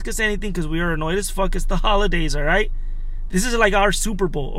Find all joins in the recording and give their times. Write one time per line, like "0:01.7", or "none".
none